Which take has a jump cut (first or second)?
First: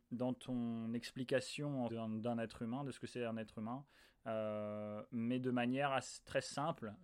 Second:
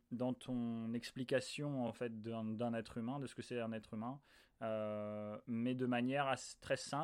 first